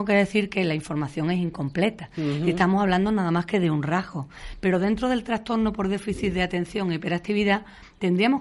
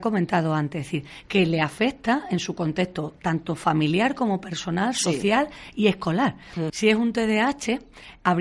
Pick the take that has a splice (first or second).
second